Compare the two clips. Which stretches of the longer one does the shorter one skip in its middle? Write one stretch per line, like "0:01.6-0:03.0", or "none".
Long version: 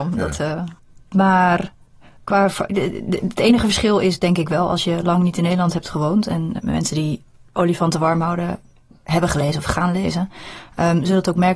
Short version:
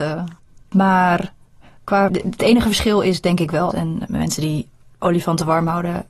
0:02.5-0:03.1
0:04.7-0:06.2